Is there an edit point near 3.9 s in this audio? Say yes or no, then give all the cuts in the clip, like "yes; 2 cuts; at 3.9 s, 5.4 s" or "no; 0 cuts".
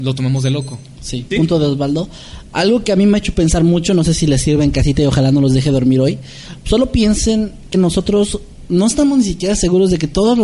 no; 3 cuts; at 1.3 s, 6.6 s, 7.7 s